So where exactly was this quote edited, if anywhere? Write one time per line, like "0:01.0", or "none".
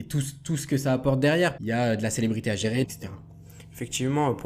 0:01.6
0:02.8